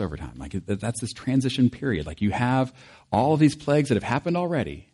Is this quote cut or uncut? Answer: uncut